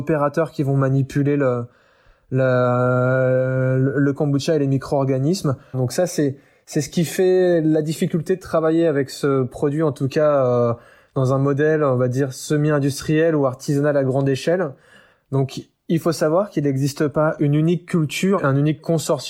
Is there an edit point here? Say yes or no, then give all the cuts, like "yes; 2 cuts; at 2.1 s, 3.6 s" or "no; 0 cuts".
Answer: yes; 3 cuts; at 5.7 s, 15.1 s, 18.4 s